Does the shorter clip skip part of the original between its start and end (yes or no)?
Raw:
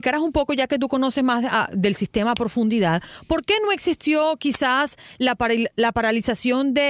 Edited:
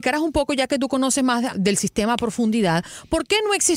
yes